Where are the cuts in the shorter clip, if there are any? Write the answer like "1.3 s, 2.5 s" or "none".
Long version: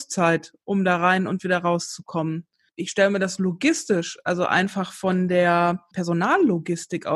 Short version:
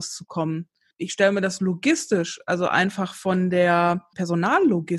none